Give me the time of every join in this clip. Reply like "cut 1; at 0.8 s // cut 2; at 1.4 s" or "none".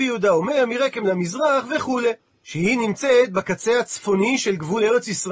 cut 1; at 2.3 s